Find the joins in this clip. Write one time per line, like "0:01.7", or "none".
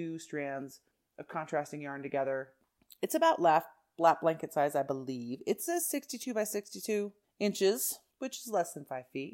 none

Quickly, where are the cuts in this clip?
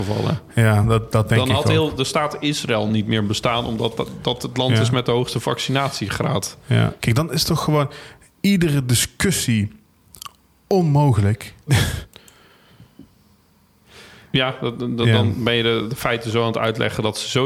0:07.0
0:11.7

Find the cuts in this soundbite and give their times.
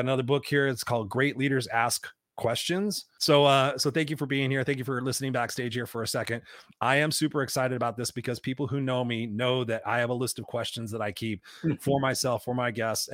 0:03.2

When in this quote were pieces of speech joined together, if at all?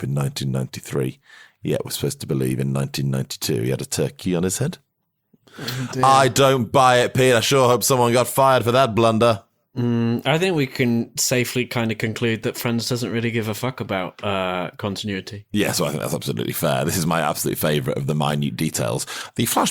none

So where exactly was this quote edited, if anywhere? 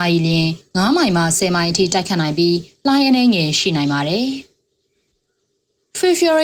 none

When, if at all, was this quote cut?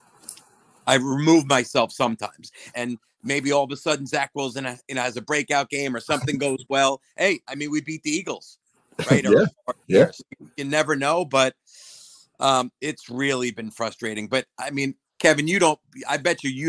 0:02.7

